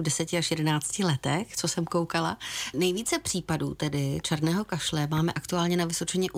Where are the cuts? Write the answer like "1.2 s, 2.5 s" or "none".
2.7 s